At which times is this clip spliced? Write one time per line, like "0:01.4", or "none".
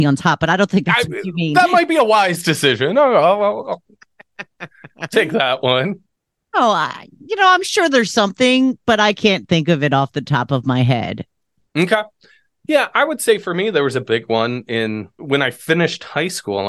none